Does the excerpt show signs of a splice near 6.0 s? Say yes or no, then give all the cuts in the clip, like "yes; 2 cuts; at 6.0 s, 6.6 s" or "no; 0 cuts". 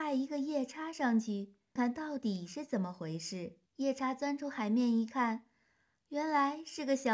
no; 2 cuts; at 1.8 s, 3.7 s